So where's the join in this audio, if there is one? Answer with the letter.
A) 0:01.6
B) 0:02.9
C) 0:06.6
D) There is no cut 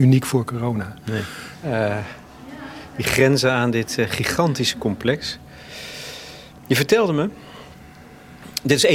A